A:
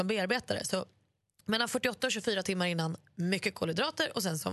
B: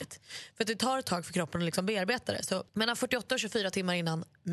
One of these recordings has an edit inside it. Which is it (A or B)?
B